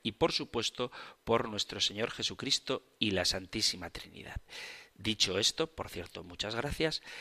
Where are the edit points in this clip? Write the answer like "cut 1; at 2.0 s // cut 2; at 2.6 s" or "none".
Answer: none